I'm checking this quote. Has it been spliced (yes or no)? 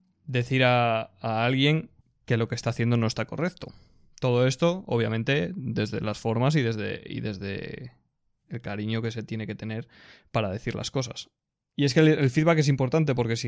no